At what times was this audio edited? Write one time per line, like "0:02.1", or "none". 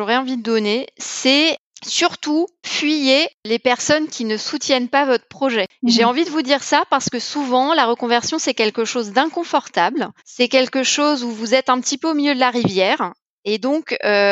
0:02.6
0:10.2